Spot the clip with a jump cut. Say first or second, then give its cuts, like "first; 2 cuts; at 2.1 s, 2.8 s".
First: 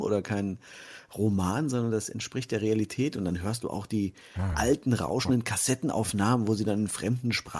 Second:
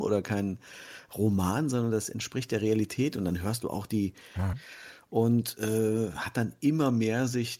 second; 1 cut; at 4.5 s